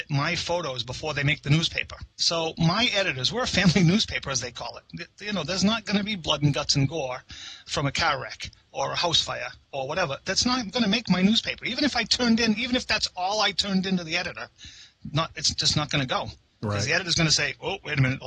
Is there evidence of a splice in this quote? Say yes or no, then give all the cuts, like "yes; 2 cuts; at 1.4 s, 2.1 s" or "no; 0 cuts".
yes; 1 cut; at 2.1 s